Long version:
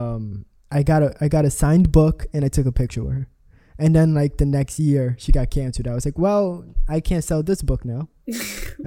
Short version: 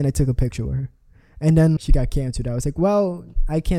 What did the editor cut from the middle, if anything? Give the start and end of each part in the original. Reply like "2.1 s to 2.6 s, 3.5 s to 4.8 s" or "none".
4.1 s to 5.2 s